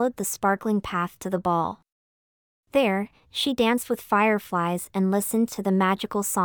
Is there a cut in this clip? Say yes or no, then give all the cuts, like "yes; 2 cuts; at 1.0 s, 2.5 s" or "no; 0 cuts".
no; 0 cuts